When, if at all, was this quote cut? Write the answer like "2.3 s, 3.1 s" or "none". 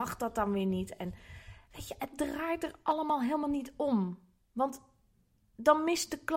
none